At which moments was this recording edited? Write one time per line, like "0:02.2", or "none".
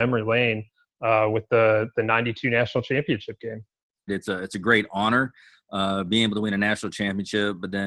0:04.1